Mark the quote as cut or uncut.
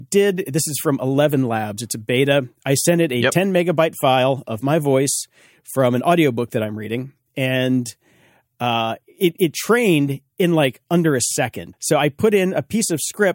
cut